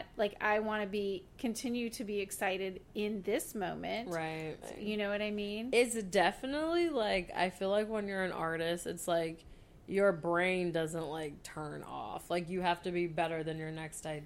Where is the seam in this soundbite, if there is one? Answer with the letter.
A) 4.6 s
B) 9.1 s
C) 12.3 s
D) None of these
A